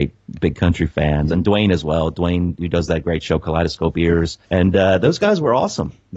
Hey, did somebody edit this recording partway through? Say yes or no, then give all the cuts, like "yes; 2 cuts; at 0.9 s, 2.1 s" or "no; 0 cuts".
yes; 2 cuts; at 1.3 s, 4.4 s